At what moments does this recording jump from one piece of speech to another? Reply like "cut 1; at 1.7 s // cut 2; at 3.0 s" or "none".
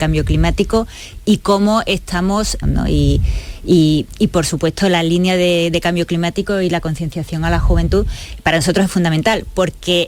cut 1; at 2.6 s